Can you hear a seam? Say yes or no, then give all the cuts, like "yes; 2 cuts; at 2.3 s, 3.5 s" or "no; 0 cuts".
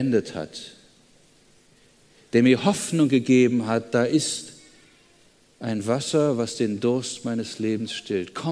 no; 0 cuts